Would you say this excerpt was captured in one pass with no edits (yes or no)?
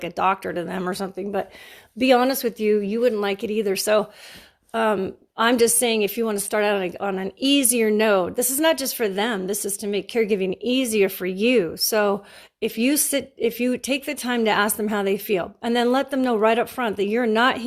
yes